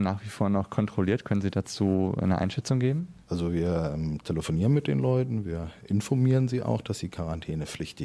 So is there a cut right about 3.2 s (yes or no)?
yes